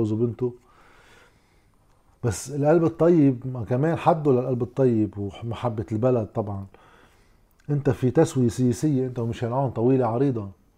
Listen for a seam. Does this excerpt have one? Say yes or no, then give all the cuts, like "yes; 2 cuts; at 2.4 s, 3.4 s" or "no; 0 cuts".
no; 0 cuts